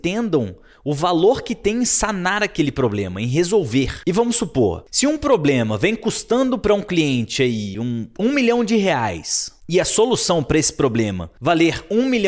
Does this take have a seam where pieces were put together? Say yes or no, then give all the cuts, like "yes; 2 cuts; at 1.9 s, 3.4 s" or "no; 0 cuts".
no; 0 cuts